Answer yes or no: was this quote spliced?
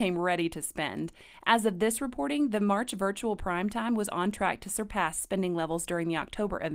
no